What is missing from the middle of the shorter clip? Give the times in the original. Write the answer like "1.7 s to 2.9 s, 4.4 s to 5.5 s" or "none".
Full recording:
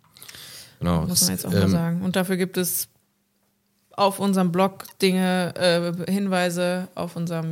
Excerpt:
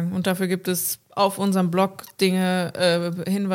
2.9 s to 3.9 s